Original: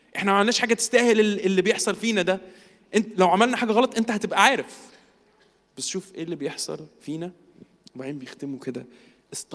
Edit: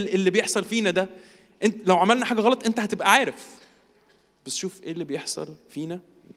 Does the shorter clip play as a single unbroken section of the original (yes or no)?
yes